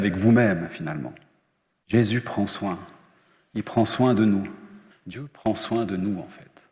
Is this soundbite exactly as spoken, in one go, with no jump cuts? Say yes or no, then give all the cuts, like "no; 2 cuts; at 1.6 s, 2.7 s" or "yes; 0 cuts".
no; 2 cuts; at 1.8 s, 4.9 s